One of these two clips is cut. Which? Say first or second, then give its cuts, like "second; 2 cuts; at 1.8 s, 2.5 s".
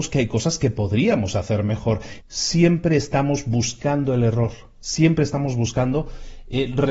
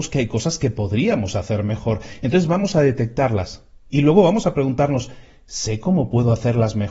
first; 1 cut; at 2.2 s